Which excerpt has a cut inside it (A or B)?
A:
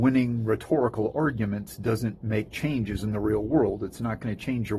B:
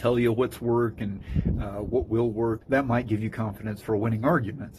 B